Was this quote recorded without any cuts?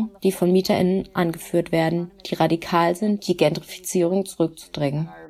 no; 1 cut; at 3.2 s

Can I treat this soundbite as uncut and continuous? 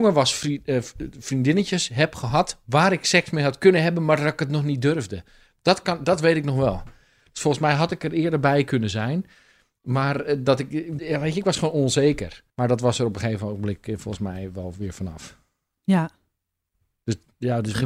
no; 2 cuts; at 11.0 s, 12.5 s

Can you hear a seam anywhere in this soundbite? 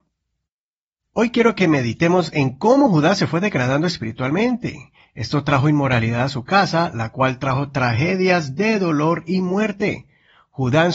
no; 0 cuts

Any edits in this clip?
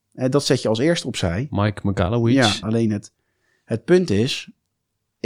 yes; 1 cut; at 2.6 s

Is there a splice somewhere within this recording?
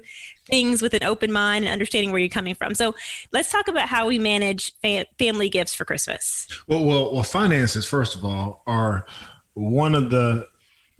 no; 0 cuts

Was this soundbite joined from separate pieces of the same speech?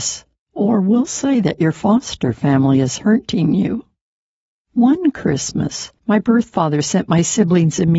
yes; 2 cuts; at 4.5 s, 6.0 s

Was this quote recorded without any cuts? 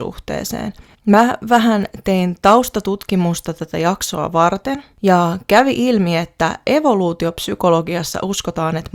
no; 1 cut; at 0.9 s

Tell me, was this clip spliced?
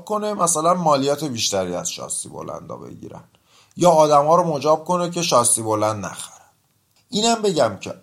no; 0 cuts

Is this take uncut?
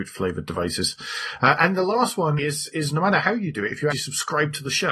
no; 2 cuts; at 2.4 s, 3.9 s

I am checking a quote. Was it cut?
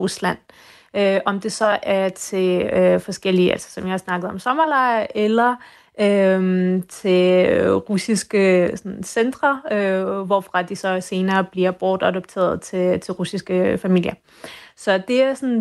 no; 0 cuts

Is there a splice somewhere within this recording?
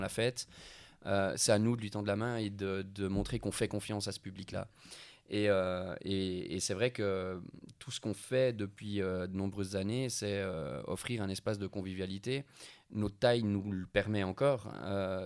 no; 0 cuts

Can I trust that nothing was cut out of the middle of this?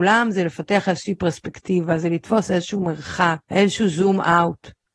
no; 1 cut; at 3.4 s

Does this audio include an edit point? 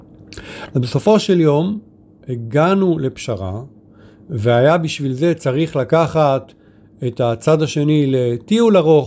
no; 0 cuts

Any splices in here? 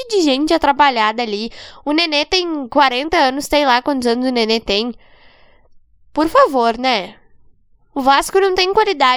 no; 0 cuts

